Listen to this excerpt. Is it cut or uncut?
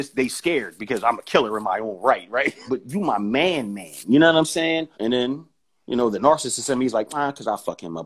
cut